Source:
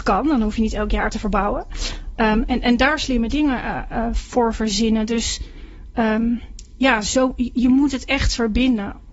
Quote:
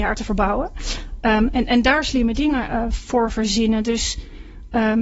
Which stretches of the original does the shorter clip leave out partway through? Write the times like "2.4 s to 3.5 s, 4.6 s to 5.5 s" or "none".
3.6 s to 3.9 s

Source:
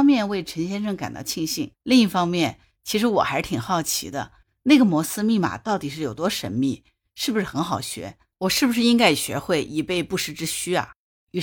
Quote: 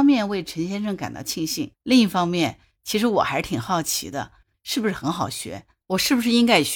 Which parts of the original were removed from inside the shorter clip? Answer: 4.5 s to 7.1 s

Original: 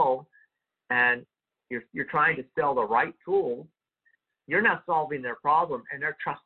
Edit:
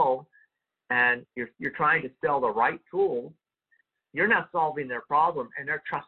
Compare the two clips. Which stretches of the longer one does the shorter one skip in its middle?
1.3 s to 1.6 s

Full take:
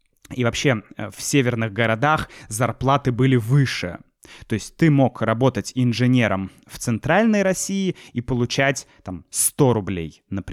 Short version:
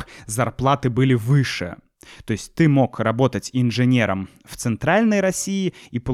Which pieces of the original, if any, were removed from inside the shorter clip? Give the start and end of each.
none

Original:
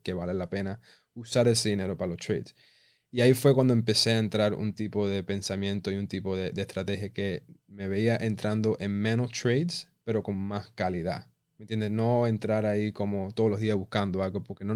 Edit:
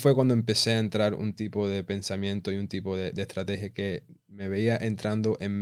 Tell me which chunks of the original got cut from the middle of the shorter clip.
none

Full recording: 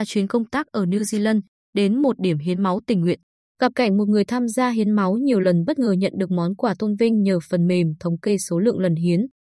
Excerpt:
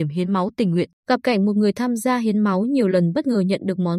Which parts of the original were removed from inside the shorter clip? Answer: 3.3 s to 3.5 s

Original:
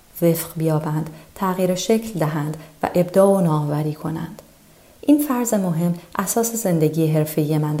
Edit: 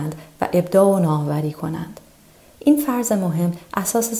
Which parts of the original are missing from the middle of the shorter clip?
none

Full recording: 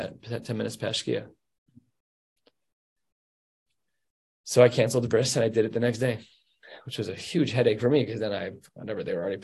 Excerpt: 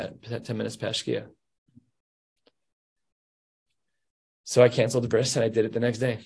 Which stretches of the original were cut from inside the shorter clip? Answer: none

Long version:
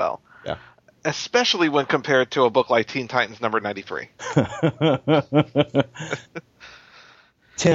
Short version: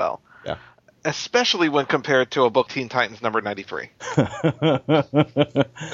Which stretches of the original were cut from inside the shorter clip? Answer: 2.7 s to 2.8 s

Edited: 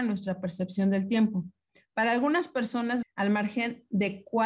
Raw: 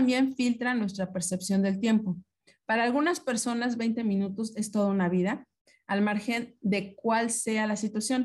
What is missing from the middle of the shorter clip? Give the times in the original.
3.7 s to 5.7 s

